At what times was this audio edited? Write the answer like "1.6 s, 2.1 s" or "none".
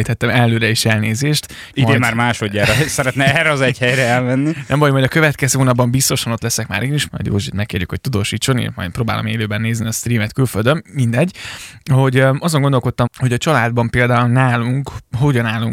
1.7 s, 7.1 s, 13.1 s